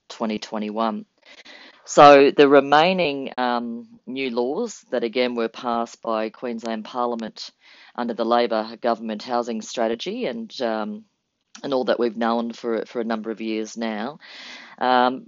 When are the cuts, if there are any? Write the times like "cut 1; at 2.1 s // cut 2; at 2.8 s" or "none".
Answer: none